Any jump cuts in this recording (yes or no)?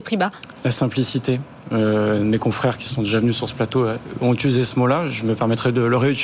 no